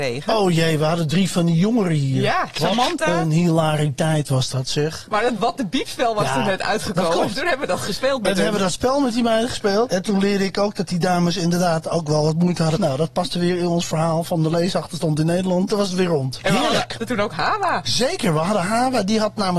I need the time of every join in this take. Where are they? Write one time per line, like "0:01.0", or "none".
0:05.1
0:12.8